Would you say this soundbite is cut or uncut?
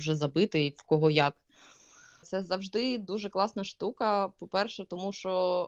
cut